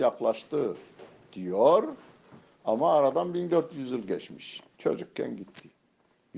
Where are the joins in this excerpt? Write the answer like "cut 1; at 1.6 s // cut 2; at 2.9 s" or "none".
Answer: cut 1; at 4.8 s